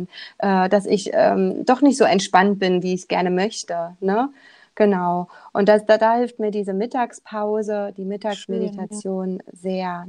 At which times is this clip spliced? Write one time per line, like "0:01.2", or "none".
none